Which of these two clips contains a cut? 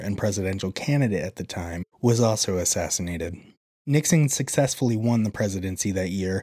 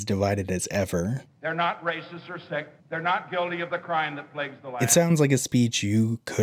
second; 2 cuts; at 1.3 s, 2.8 s

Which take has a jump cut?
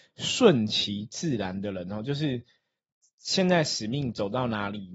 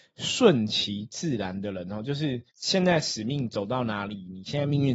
second; 1 cut; at 2.5 s

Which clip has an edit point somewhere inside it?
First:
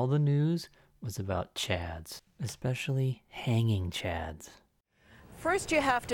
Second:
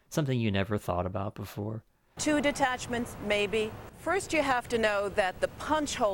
second; 2 cuts; at 2.2 s, 3.9 s

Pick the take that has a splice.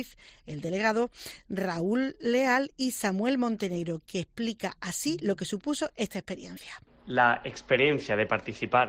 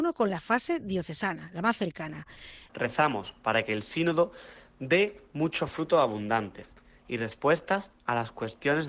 second; 1 cut; at 2.7 s

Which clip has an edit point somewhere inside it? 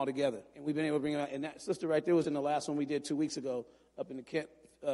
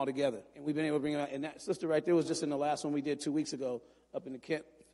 first; 1 cut; at 2.2 s

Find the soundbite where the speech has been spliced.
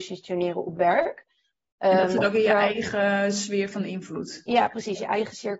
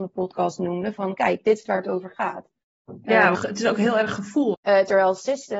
second; 2 cuts; at 3.3 s, 4.5 s

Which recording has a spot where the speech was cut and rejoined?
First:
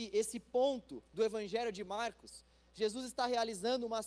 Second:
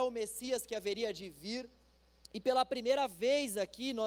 second; 1 cut; at 2.2 s

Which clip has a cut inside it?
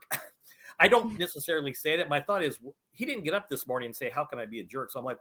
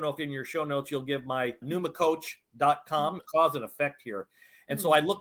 second; 2 cuts; at 1.6 s, 3.2 s

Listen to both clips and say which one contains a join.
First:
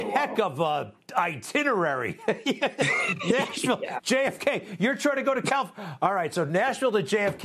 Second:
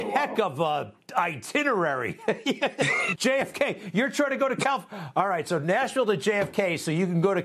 second; 1 cut; at 3.2 s

